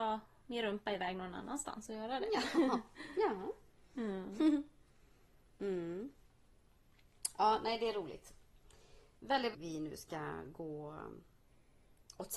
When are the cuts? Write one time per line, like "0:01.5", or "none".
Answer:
0:09.5